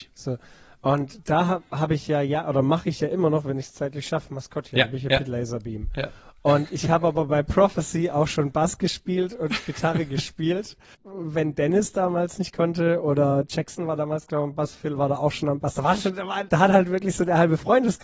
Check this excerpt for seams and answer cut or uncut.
cut